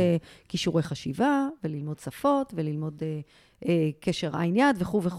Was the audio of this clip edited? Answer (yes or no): no